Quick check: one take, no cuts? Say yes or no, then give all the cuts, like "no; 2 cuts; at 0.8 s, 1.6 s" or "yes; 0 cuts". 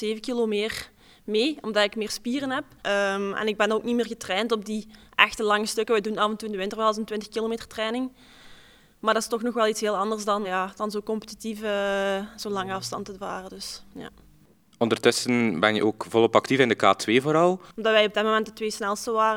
no; 3 cuts; at 2.8 s, 10.4 s, 17.7 s